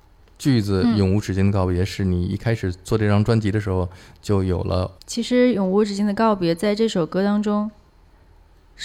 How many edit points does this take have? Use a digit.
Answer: 1